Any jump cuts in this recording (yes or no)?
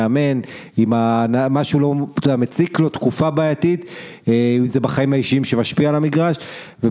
no